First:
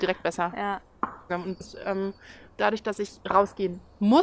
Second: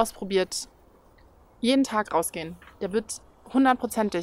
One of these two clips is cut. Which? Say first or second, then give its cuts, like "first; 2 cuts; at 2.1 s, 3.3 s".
first; 1 cut; at 1.3 s